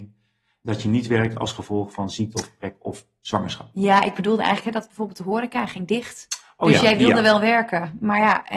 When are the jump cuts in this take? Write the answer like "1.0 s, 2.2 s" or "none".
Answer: none